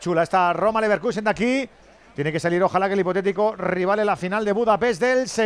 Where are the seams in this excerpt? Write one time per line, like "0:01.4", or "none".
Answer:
none